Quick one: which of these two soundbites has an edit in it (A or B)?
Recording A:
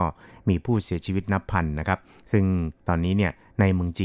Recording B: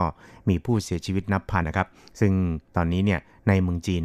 B